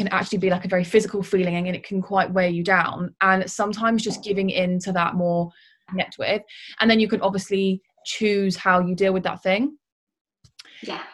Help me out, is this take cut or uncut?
cut